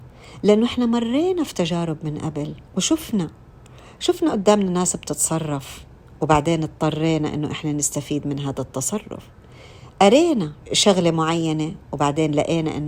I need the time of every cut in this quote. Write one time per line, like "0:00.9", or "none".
0:02.7
0:10.6